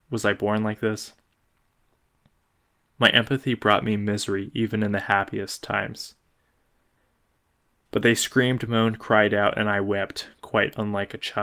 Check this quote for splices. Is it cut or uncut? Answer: uncut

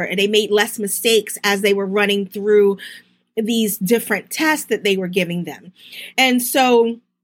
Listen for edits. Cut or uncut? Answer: uncut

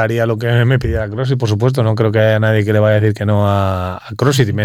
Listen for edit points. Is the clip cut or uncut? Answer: uncut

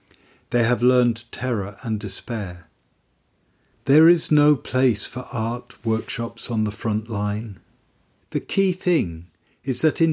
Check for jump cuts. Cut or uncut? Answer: cut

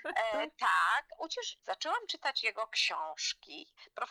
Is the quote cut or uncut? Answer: cut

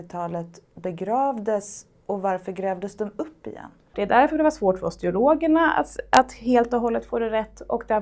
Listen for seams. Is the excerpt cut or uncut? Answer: cut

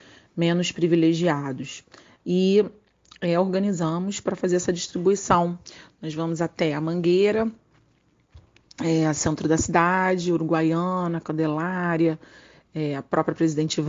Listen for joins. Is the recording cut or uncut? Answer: cut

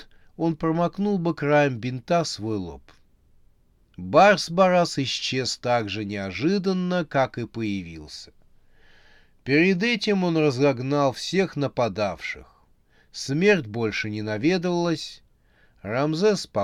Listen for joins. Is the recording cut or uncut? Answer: uncut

